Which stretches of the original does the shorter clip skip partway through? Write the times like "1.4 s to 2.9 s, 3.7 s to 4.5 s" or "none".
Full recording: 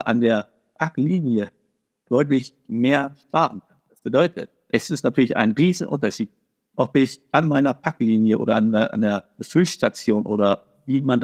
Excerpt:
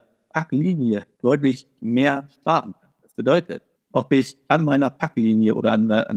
1.6 s to 2.0 s, 4.6 s to 6.6 s